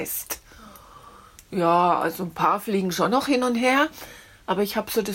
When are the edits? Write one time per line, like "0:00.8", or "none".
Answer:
none